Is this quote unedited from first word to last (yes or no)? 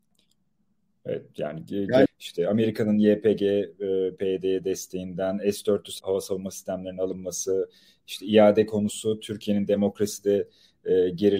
no